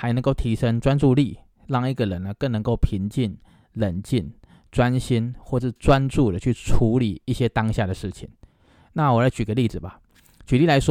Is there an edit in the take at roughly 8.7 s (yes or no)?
no